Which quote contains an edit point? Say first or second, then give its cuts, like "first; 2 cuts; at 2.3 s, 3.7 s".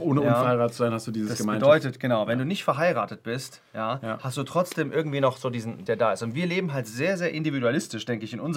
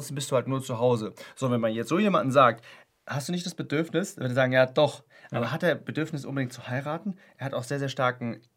first; 1 cut; at 5.9 s